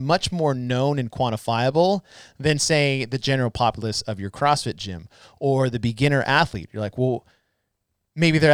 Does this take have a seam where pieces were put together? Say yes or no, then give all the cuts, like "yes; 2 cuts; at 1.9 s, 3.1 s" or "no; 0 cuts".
no; 0 cuts